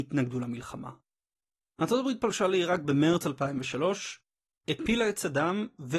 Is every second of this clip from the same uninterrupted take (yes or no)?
no